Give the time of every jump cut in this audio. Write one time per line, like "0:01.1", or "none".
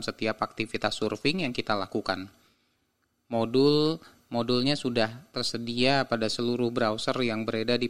none